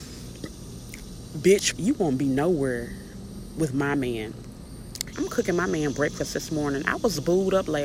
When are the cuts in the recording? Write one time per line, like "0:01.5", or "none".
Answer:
0:01.8
0:05.1